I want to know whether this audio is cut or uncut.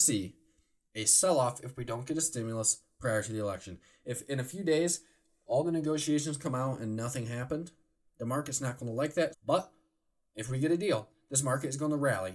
cut